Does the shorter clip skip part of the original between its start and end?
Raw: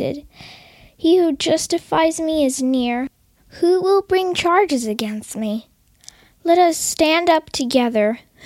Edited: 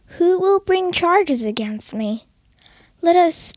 no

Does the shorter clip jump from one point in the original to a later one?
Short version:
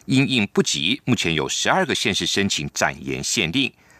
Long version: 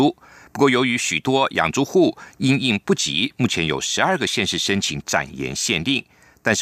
no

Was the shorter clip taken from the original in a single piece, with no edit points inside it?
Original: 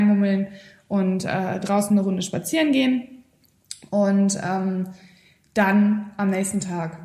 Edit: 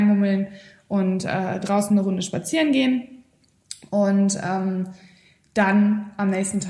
yes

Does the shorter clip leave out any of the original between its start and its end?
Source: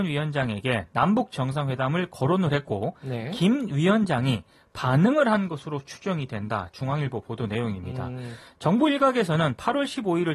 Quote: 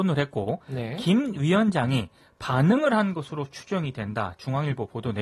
no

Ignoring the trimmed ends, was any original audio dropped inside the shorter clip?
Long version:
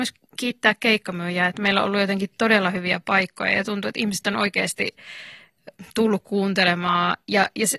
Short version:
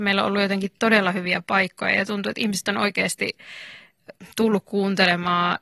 no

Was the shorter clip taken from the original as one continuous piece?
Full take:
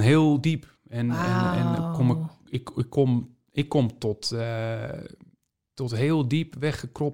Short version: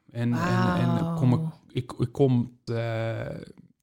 no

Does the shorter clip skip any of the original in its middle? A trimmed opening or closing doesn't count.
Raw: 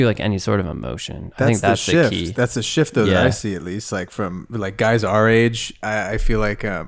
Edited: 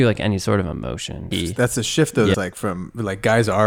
yes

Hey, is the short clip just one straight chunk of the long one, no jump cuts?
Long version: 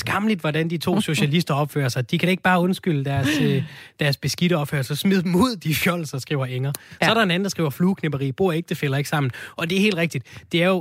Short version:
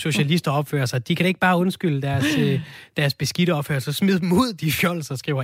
yes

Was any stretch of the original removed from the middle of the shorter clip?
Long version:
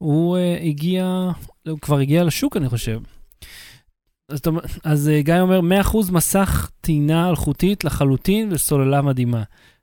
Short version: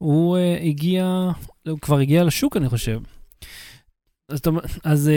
no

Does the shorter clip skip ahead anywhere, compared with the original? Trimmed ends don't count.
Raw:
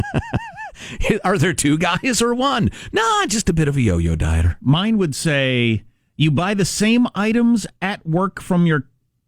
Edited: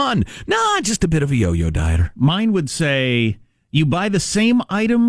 no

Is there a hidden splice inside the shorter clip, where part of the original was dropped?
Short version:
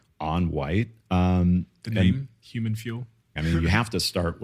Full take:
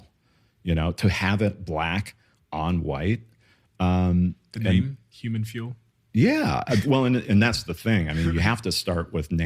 yes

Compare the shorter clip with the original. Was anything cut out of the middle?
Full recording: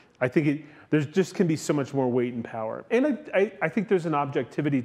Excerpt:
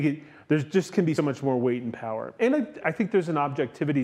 yes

